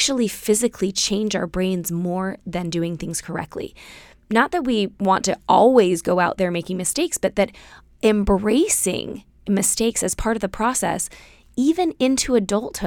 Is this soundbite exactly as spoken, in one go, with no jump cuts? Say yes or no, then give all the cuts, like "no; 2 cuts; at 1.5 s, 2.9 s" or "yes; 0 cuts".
yes; 0 cuts